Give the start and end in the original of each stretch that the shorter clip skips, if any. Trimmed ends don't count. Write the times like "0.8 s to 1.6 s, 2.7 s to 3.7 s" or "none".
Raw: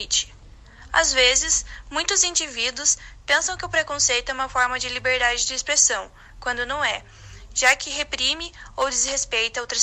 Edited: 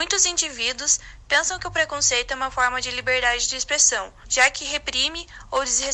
6.2 s to 7.5 s